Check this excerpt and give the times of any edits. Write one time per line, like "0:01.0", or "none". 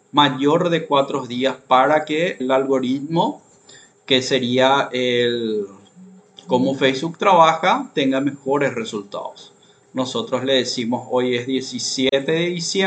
0:02.4
0:09.8